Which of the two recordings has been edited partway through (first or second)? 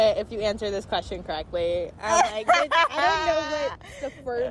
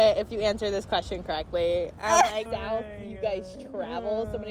second